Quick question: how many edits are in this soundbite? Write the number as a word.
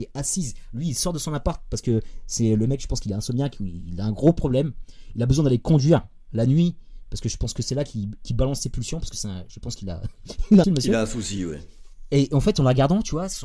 one